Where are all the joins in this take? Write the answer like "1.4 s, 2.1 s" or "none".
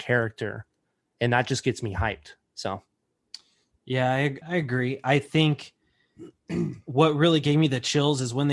4.4 s